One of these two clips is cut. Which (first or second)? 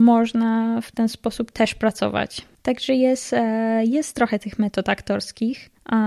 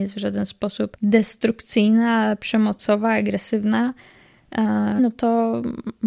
second